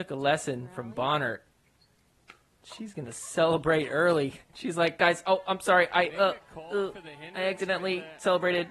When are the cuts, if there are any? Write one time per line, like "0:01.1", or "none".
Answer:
0:06.1